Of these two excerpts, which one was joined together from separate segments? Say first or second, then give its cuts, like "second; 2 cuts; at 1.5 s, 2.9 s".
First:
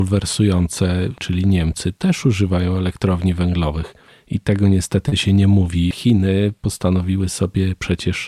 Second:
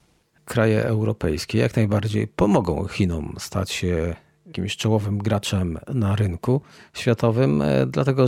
first; 2 cuts; at 1.2 s, 5.9 s